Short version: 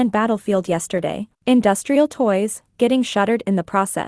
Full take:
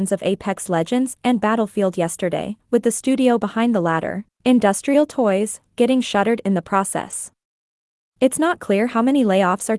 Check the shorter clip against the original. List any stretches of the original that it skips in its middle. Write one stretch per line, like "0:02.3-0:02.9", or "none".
0:02.6-0:04.3